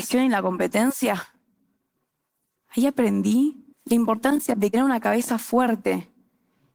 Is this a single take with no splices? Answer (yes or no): no